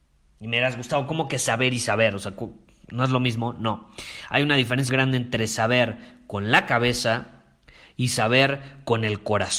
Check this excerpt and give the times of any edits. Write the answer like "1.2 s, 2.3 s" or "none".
4.9 s